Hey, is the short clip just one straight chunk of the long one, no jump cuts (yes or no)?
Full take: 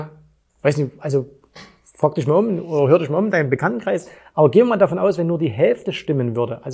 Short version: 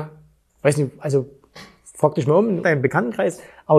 no